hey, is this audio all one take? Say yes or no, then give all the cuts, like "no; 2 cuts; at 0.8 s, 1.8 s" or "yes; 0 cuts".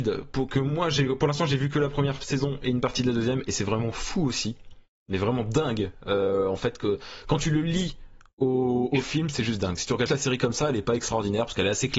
no; 1 cut; at 10.1 s